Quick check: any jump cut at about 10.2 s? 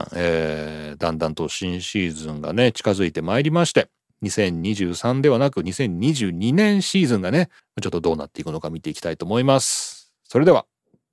no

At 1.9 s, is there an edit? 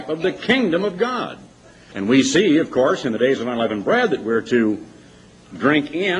yes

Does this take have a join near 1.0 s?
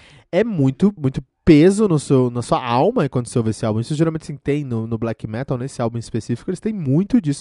yes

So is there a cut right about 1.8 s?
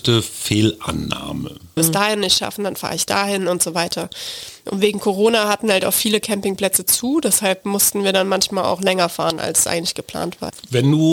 yes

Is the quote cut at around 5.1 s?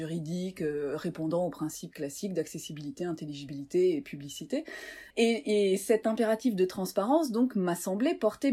yes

